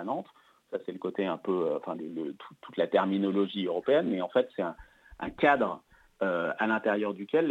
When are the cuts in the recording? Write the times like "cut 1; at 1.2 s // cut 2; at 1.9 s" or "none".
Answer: none